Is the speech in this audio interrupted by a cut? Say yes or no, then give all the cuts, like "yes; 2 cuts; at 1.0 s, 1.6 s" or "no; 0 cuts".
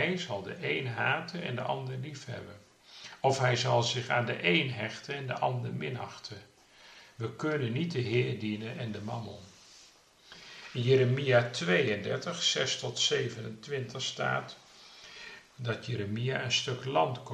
no; 0 cuts